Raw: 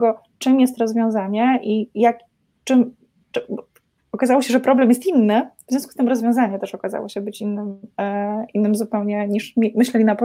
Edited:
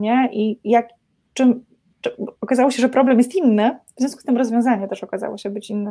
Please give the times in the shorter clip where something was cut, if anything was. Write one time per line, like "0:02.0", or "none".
0:02.4